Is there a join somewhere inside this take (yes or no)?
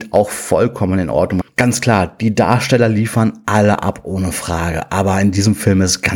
yes